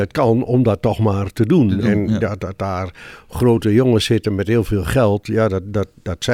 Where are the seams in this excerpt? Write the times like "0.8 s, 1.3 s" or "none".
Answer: none